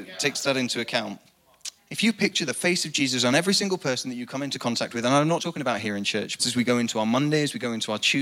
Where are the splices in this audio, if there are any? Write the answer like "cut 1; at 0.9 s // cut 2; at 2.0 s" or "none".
cut 1; at 1.8 s // cut 2; at 5.4 s // cut 3; at 6.4 s